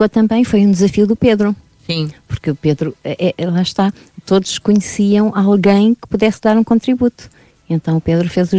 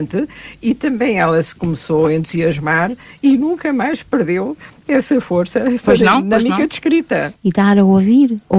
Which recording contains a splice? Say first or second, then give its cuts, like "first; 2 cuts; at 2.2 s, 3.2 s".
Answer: second; 1 cut; at 7.3 s